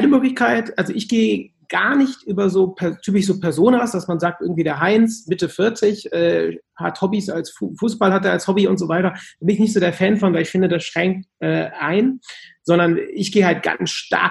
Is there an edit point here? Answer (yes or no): no